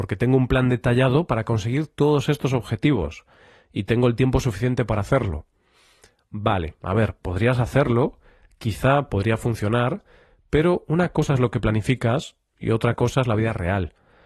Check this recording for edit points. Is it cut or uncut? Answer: uncut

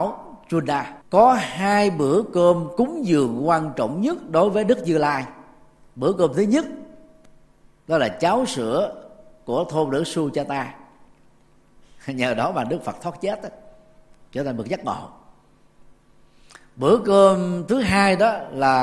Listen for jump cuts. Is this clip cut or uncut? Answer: cut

